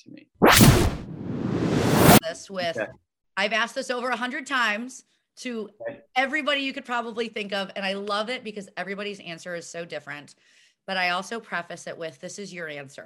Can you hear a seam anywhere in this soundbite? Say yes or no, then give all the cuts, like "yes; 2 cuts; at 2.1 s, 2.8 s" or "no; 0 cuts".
yes; 1 cut; at 2.2 s